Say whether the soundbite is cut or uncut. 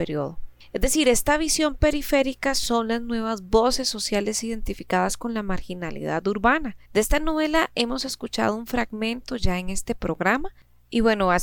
cut